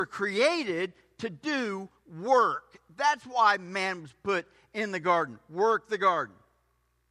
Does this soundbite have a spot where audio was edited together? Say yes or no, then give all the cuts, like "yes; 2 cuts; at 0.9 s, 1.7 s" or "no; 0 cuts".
no; 0 cuts